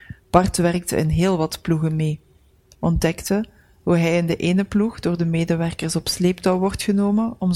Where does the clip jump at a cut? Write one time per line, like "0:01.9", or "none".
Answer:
none